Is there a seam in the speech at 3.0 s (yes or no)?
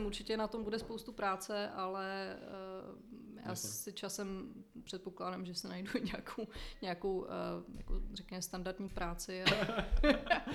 no